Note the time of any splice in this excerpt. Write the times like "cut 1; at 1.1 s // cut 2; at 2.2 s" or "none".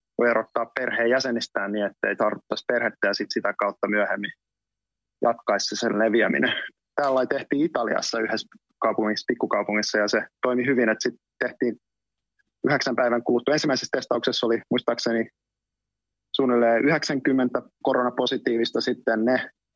none